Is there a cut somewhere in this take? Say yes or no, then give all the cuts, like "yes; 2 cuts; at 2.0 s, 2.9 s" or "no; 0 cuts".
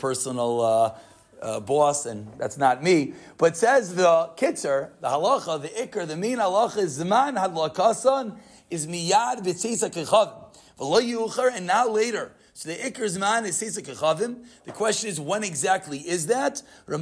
no; 0 cuts